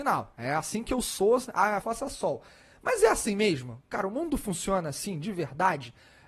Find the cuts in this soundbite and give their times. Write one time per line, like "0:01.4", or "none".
0:01.8